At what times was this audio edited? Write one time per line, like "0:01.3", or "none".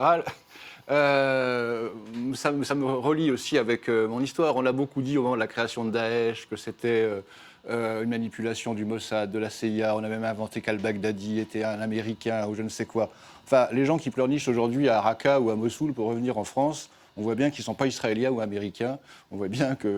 none